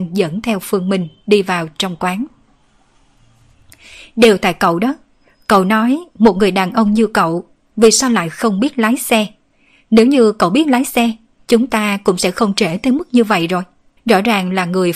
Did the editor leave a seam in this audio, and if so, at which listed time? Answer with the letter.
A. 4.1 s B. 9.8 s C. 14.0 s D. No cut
C